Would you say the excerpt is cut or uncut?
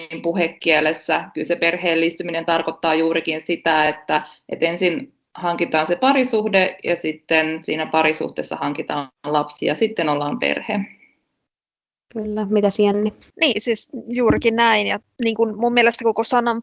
uncut